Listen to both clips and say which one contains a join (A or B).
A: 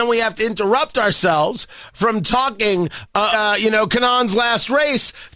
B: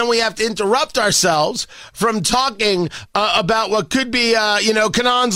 A